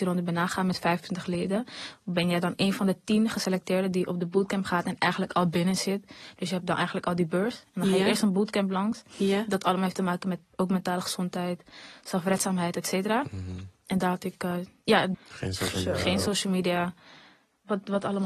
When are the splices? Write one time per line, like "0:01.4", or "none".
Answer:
0:15.1